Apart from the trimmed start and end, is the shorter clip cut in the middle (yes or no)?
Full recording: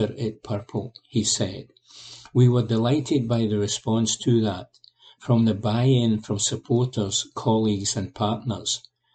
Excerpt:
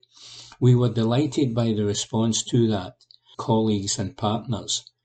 yes